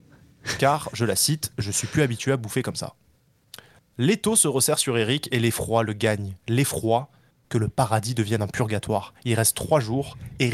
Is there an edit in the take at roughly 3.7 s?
no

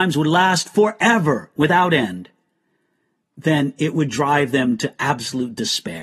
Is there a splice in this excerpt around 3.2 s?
no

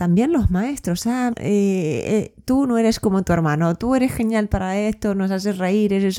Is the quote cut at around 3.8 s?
no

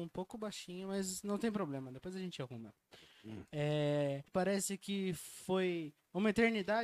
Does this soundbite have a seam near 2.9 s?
no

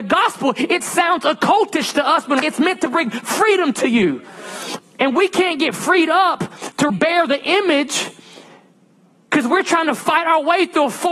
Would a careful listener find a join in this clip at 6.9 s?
yes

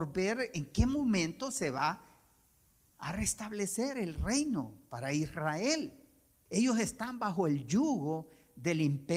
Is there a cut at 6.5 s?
yes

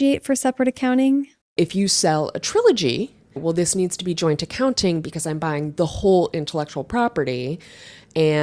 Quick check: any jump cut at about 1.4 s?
yes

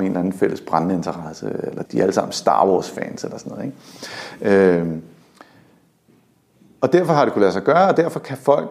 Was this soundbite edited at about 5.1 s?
no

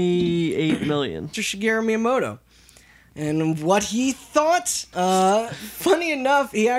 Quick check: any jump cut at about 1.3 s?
yes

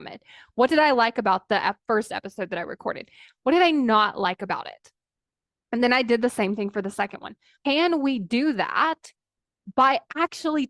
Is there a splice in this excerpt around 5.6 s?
no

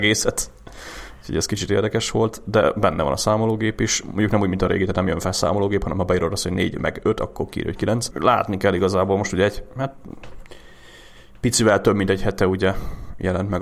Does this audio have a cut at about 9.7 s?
no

